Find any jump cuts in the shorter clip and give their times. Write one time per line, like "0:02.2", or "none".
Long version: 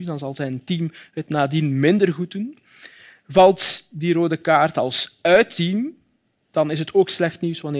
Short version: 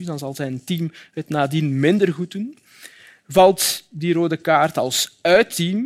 none